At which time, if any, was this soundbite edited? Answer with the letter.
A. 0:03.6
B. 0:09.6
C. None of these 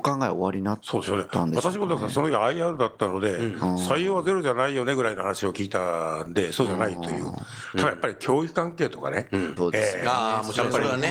B